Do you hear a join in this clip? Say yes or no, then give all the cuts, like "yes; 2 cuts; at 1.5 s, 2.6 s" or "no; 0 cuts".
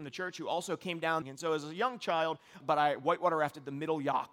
yes; 2 cuts; at 1.2 s, 2.6 s